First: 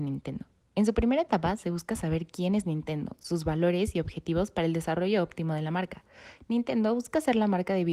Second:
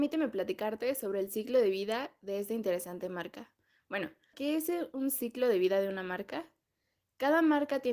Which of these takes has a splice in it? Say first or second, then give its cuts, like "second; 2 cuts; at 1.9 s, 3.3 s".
second; 1 cut; at 4.3 s